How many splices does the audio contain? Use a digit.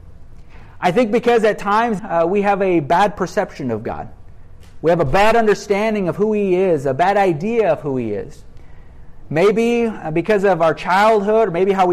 1